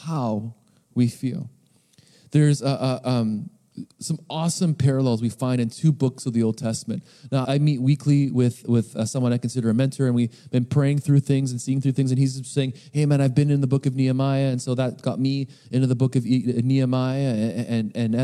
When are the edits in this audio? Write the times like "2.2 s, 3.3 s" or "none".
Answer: 7.4 s